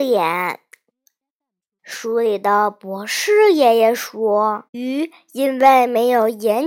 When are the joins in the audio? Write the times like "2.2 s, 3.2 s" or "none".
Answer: 1.8 s, 4.7 s